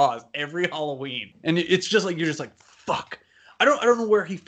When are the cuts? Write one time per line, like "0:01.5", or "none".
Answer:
none